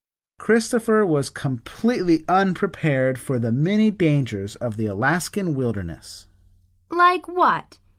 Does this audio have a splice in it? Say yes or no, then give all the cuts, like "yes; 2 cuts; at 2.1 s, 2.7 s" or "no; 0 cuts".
no; 0 cuts